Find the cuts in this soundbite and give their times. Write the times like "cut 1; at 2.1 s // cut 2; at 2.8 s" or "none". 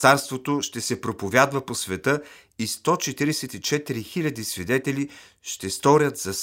none